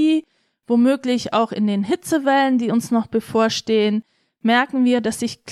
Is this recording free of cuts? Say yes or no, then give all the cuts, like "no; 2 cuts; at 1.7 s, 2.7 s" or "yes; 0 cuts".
yes; 0 cuts